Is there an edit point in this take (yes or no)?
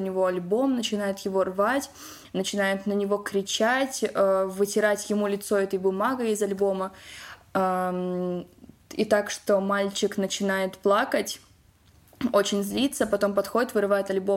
no